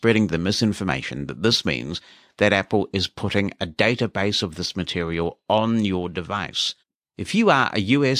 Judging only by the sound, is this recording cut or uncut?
cut